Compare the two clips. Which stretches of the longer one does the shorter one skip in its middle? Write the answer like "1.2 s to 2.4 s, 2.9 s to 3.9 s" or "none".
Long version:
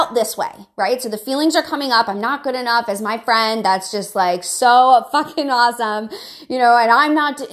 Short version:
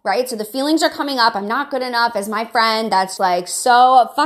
3.9 s to 4.1 s